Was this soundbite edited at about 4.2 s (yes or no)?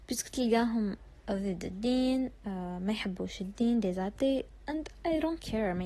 no